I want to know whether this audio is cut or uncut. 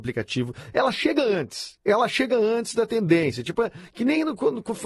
uncut